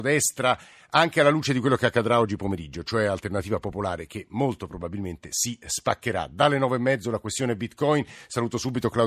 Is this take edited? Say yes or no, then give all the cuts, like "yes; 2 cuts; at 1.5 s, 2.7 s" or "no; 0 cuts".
no; 0 cuts